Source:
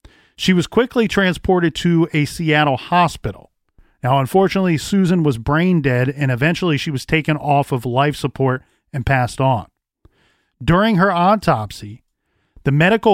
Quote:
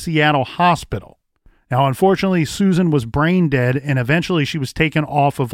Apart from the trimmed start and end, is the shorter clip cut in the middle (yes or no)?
no